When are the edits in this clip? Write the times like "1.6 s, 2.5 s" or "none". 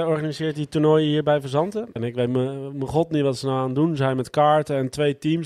2.0 s